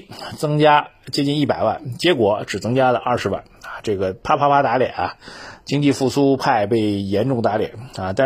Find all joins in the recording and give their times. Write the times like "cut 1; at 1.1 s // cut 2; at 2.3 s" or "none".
none